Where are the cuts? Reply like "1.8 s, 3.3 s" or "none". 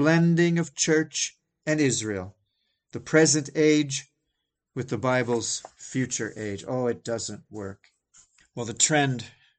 8.4 s